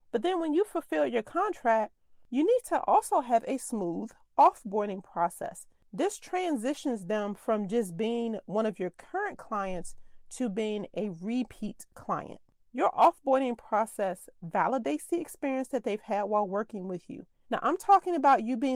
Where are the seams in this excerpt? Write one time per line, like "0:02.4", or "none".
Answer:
0:17.5